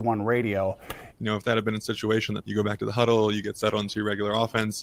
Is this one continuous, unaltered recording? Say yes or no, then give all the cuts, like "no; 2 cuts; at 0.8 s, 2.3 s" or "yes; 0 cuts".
no; 2 cuts; at 1.1 s, 2.4 s